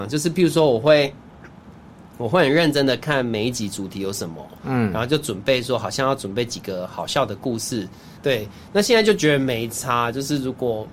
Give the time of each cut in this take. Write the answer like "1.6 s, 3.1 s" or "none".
8.2 s